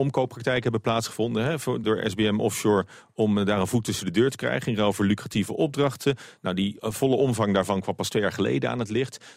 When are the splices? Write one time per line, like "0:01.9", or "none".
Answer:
0:01.8